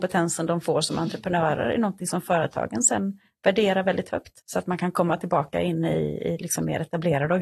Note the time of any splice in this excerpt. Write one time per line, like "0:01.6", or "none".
0:04.4